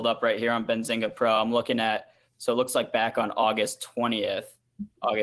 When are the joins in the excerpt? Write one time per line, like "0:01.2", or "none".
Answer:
none